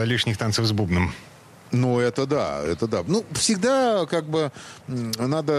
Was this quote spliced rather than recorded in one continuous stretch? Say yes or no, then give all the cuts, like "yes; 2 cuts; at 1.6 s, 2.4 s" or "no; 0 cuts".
no; 0 cuts